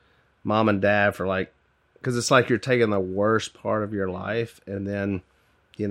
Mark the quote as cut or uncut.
uncut